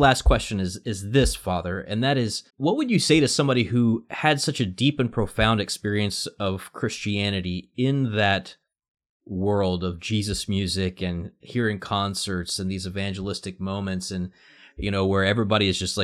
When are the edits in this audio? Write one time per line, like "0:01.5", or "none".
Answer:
0:02.5